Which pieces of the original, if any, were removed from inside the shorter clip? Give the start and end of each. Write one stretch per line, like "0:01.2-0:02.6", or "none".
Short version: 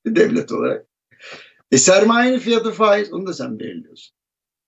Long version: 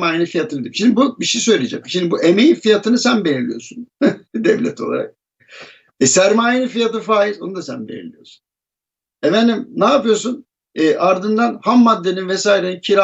none